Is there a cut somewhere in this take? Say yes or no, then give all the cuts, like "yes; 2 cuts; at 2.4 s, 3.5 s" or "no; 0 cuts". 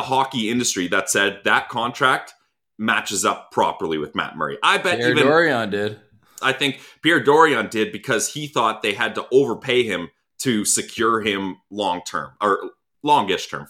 yes; 1 cut; at 6.4 s